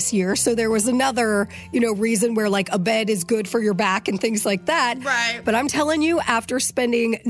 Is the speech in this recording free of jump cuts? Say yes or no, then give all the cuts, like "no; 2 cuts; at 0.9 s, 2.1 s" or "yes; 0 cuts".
yes; 0 cuts